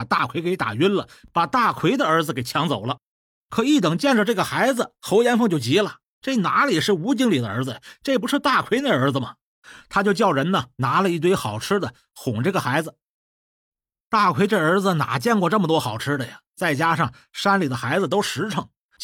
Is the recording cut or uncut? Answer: uncut